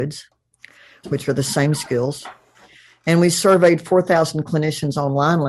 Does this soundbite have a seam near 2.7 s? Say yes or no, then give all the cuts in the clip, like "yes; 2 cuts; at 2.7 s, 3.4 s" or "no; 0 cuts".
no; 1 cut; at 1.0 s